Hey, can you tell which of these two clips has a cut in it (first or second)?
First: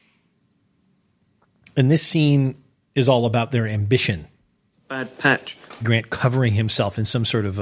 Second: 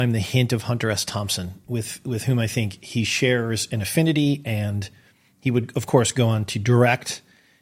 first